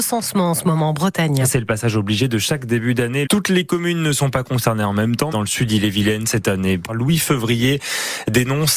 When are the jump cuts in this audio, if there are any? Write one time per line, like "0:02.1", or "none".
0:03.3
0:05.3
0:06.9